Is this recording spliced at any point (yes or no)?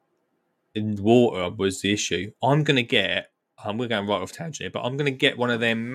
no